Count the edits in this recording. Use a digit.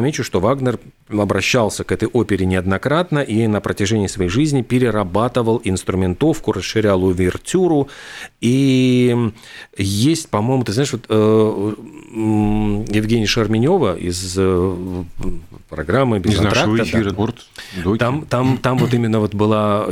1